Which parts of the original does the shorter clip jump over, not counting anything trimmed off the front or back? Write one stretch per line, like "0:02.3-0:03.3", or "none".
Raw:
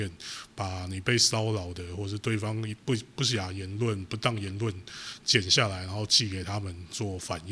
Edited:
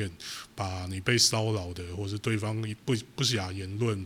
none